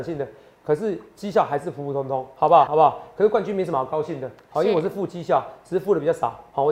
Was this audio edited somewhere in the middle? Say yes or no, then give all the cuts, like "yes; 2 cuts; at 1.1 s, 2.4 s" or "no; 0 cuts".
yes; 1 cut; at 2.7 s